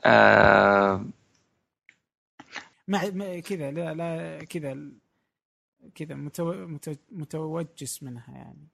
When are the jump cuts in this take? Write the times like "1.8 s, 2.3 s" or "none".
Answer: 2.7 s